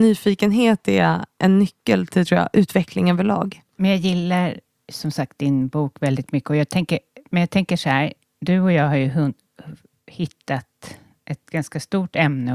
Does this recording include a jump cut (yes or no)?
no